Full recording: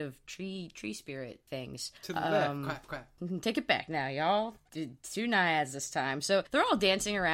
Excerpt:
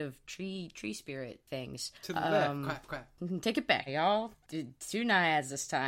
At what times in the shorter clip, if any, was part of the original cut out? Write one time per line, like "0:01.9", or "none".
0:03.9